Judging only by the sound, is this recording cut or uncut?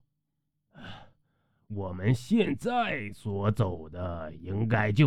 uncut